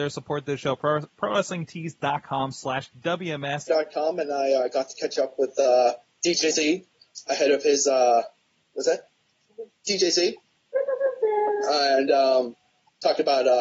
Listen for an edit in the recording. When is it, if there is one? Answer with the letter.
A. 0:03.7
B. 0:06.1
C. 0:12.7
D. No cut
A